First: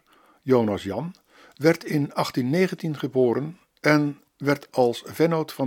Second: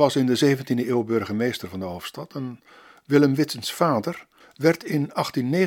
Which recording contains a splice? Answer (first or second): second